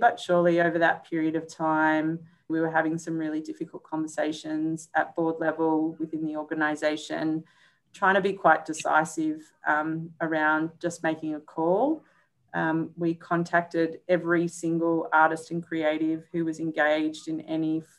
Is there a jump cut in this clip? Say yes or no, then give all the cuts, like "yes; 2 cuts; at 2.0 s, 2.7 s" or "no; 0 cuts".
yes; 1 cut; at 2.5 s